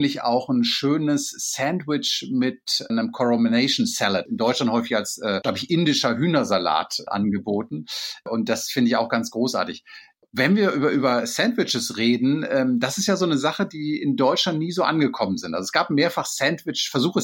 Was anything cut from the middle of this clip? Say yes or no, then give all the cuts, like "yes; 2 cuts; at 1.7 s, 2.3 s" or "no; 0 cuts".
no; 0 cuts